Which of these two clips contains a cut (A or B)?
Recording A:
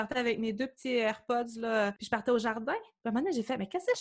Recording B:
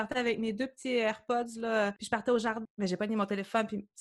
B